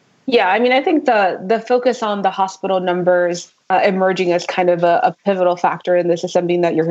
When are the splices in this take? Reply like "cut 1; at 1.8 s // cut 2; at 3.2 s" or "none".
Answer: cut 1; at 3.6 s